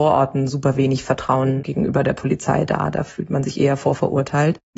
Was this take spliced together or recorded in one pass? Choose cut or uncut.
uncut